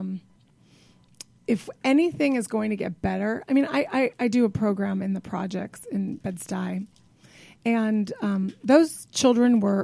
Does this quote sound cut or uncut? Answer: uncut